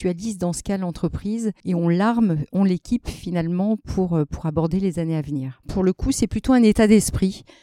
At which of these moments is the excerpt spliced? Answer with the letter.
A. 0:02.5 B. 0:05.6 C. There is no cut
B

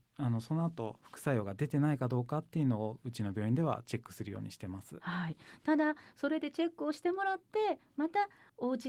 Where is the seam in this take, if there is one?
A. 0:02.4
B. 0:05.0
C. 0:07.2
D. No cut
D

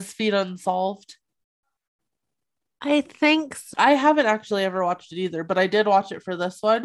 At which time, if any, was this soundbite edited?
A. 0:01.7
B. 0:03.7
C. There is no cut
B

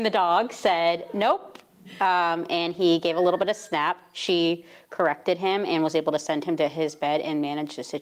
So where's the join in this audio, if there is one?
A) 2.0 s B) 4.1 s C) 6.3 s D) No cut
D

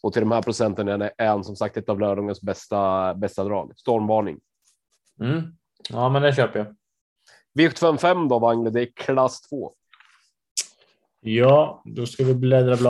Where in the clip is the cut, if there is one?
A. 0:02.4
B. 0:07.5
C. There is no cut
C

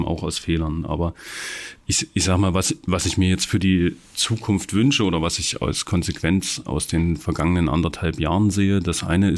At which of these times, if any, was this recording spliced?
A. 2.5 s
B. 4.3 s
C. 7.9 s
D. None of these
D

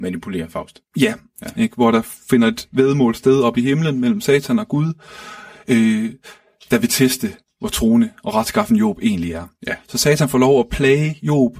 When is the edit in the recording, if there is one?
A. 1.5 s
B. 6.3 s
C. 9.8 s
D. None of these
A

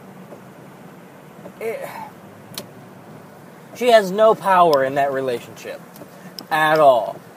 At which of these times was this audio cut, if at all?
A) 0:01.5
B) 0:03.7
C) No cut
C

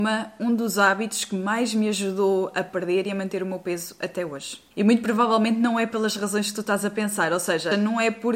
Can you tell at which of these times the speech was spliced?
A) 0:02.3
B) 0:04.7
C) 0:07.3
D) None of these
D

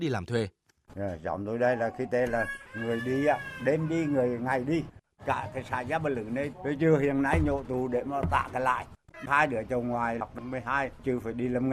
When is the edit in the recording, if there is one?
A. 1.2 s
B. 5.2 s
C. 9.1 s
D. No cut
C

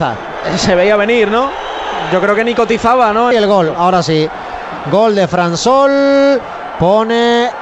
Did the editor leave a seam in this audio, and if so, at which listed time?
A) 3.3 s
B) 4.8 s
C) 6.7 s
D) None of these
A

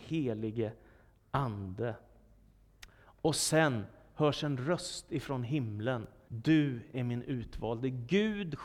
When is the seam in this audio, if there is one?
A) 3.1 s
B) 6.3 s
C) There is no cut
B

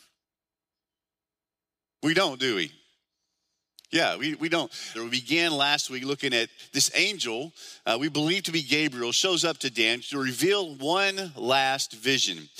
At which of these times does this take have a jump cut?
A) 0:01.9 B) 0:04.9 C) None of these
B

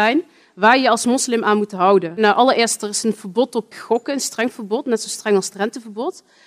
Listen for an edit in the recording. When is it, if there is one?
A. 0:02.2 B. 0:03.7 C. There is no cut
B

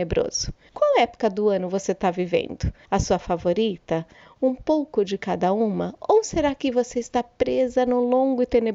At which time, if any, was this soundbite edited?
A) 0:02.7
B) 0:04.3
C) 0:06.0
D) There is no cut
D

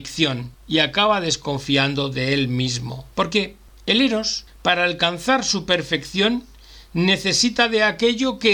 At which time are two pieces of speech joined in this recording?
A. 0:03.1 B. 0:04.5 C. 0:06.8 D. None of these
A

